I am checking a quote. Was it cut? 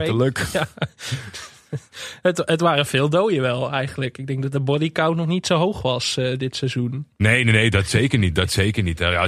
no; 0 cuts

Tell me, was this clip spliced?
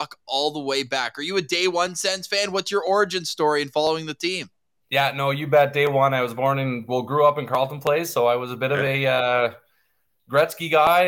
no; 0 cuts

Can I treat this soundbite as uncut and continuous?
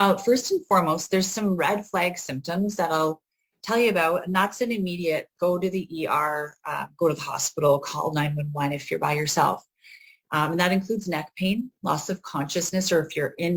no; 1 cut; at 5.3 s

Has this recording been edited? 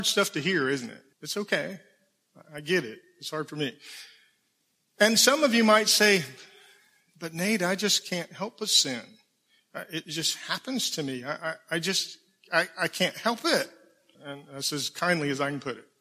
yes; 2 cuts; at 1.1 s, 14.1 s

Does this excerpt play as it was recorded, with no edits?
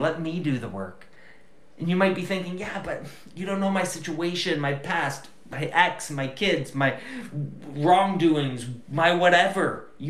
yes; 0 cuts

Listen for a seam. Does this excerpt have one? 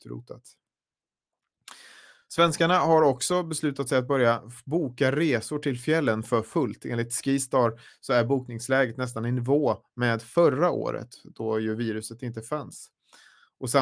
no; 0 cuts

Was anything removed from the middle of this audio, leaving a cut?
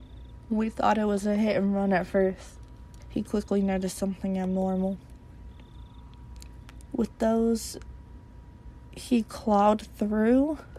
yes; 2 cuts; at 3.0 s, 6.9 s

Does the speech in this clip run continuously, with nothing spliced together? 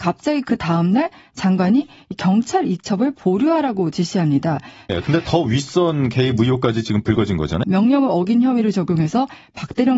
no; 2 cuts; at 4.9 s, 7.6 s

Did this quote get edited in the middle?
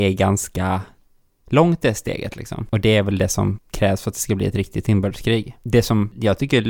no; 0 cuts

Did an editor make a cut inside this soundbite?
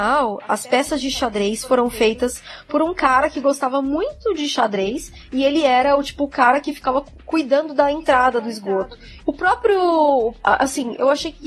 yes; 1 cut; at 9.2 s

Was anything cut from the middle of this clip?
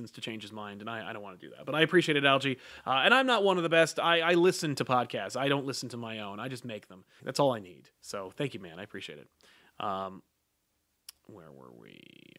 yes; 1 cut; at 7.2 s

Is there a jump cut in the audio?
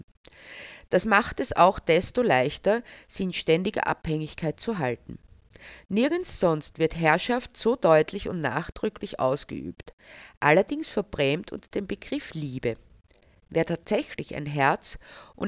no; 0 cuts

